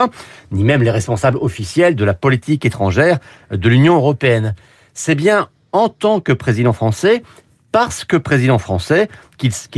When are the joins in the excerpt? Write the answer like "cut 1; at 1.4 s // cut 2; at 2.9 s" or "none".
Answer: none